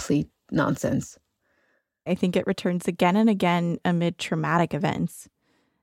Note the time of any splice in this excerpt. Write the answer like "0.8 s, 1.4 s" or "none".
2.1 s